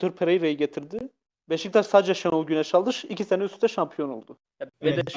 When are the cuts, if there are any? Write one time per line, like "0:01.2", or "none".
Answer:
none